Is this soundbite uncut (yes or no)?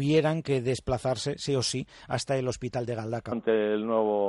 no